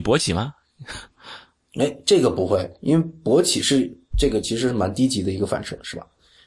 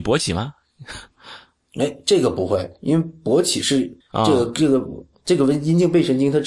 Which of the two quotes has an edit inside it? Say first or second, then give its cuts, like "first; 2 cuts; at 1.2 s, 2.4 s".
second; 1 cut; at 4.0 s